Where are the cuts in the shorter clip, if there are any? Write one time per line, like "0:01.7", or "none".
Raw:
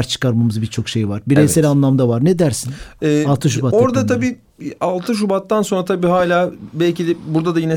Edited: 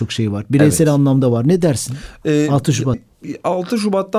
0:02.9